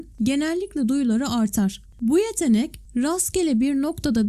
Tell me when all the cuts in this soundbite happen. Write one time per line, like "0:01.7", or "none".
0:01.8